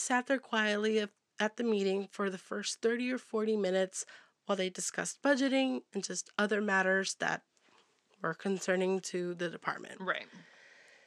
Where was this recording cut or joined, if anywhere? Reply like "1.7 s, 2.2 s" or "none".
none